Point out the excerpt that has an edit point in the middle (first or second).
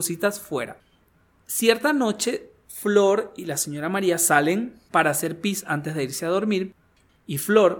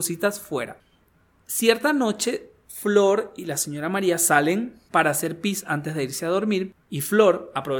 second